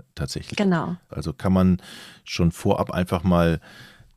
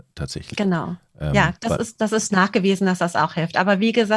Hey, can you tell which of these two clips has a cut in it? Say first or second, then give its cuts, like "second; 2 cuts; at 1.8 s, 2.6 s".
first; 1 cut; at 1.1 s